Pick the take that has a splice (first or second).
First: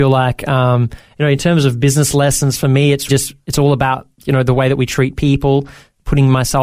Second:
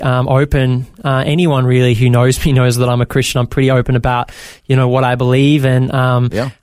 first